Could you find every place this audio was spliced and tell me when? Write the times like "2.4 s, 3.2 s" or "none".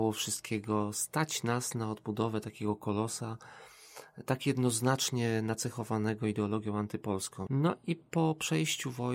7.5 s